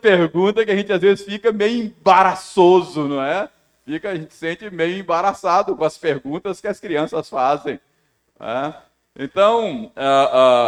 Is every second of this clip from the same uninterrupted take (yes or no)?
yes